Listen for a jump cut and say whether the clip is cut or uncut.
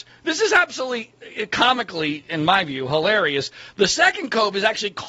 uncut